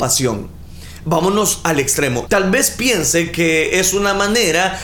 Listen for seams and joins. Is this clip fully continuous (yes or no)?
no